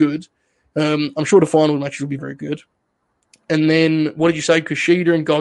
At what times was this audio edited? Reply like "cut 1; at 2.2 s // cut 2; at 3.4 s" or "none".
cut 1; at 2.2 s